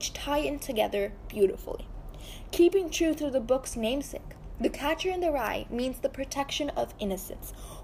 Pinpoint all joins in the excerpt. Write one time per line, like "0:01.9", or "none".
none